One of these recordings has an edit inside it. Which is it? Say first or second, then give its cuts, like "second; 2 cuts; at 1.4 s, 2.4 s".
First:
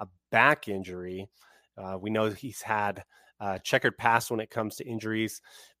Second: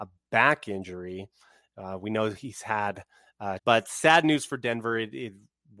second; 1 cut; at 3.6 s